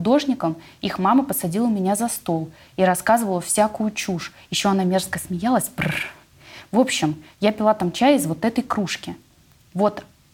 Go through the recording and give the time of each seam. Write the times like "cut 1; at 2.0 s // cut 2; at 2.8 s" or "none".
none